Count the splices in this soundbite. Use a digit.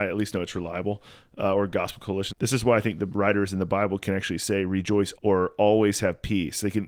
2